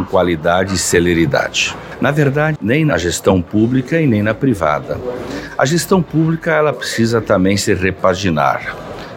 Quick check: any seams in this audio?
yes; 1 cut; at 2.6 s

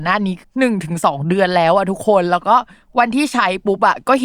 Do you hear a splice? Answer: no; 0 cuts

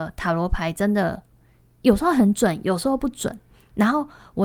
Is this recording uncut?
yes; 0 cuts

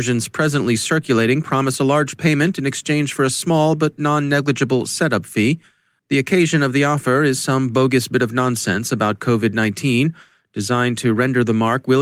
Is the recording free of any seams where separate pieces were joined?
yes; 0 cuts

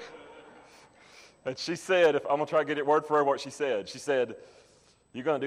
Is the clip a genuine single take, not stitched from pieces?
yes; 0 cuts

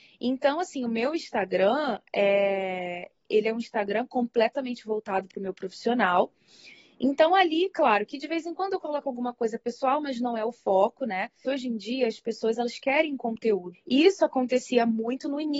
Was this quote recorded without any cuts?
no; 2 cuts; at 11.4 s, 13.7 s

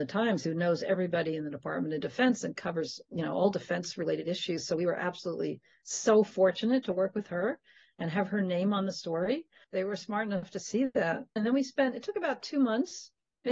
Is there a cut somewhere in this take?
yes; 2 cuts; at 9.6 s, 11.4 s

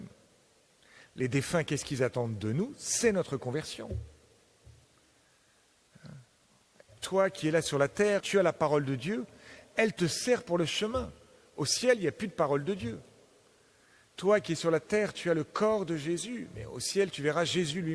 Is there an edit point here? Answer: yes; 1 cut; at 8.2 s

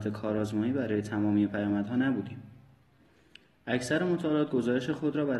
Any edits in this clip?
no; 0 cuts

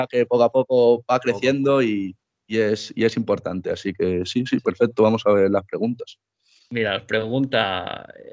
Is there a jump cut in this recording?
no; 0 cuts

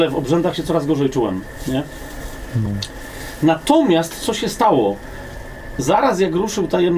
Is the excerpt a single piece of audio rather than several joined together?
yes; 0 cuts

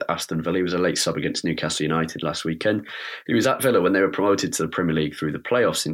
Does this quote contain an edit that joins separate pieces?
no; 0 cuts

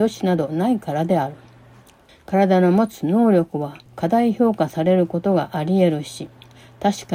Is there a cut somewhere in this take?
yes; 2 cuts; at 2.1 s, 3.9 s

